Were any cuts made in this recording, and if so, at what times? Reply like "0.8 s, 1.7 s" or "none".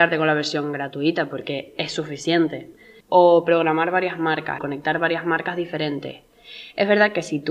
3.0 s, 4.6 s